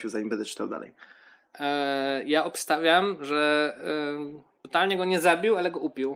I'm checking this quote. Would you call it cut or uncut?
uncut